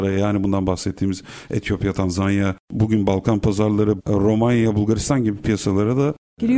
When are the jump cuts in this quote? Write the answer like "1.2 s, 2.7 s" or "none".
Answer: 4.0 s

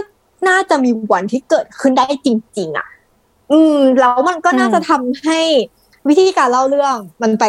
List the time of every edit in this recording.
none

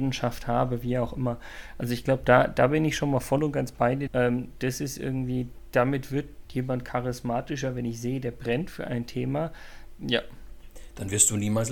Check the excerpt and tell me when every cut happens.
4.1 s, 10.0 s

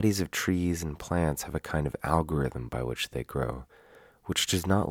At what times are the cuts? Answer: none

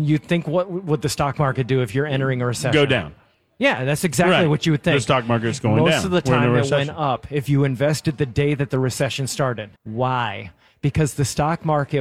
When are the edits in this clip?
9.8 s

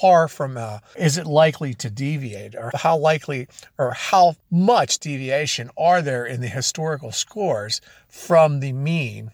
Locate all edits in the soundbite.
0.9 s, 2.7 s, 4.4 s

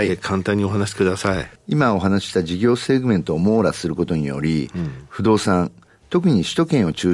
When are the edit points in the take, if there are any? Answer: none

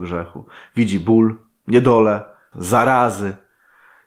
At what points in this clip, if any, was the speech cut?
2.5 s

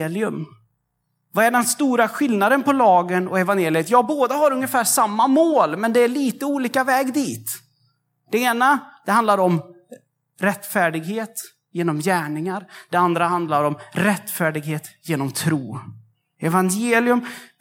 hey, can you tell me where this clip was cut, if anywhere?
none

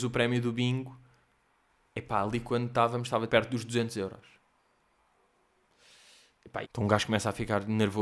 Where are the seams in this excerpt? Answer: 3.3 s, 6.6 s

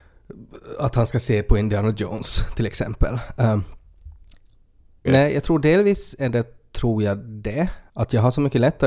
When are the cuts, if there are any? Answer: 5.1 s, 7.9 s

